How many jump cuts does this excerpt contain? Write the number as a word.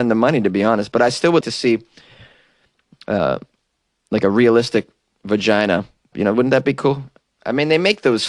two